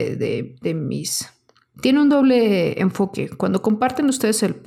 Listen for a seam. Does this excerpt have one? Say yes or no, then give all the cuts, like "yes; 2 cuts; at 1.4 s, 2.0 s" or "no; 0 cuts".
yes; 1 cut; at 1.7 s